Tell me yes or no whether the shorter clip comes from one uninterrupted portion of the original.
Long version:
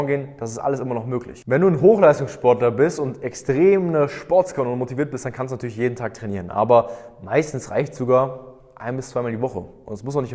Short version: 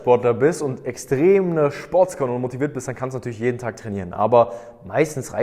yes